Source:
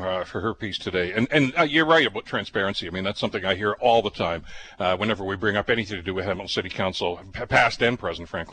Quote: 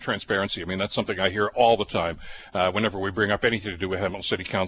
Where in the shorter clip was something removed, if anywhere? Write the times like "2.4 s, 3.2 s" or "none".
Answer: none